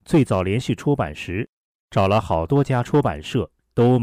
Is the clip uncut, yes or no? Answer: yes